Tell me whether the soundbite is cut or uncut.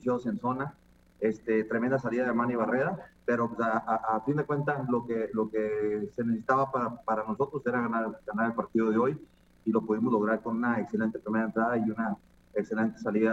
uncut